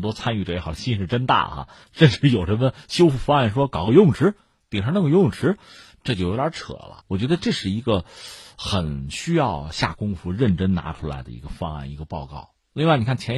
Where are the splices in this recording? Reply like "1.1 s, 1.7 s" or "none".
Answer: 7.0 s